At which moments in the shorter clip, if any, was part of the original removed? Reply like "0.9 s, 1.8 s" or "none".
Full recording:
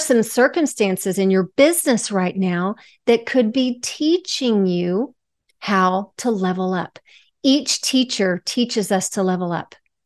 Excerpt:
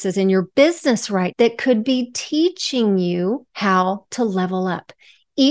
1.3 s, 3.5 s